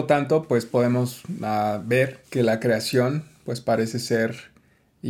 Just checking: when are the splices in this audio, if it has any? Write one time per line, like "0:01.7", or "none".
0:02.2